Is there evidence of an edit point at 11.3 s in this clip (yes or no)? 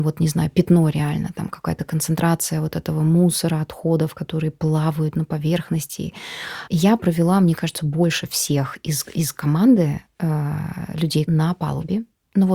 yes